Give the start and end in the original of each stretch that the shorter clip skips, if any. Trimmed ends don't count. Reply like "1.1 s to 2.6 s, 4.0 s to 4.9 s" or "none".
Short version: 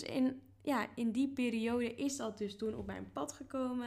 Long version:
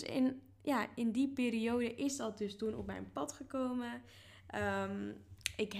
none